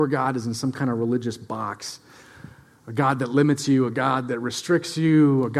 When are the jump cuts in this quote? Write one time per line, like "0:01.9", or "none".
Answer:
0:03.9